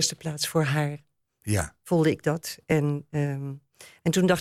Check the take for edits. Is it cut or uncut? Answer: uncut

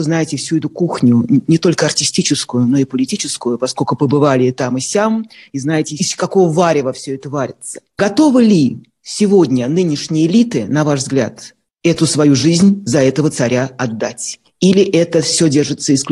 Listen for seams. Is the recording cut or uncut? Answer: uncut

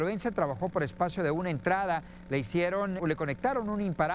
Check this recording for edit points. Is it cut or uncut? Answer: cut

